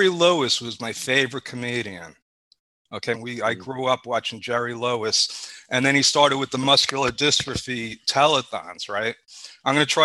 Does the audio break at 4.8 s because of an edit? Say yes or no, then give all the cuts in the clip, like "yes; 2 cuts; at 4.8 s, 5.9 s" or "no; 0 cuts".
no; 1 cut; at 3.1 s